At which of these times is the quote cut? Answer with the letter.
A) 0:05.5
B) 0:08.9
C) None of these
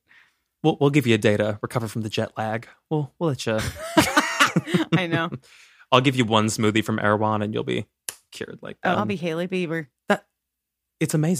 B